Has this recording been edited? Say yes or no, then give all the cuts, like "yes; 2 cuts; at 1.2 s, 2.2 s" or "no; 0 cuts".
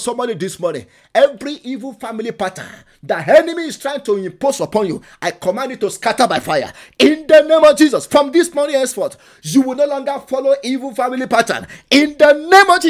no; 0 cuts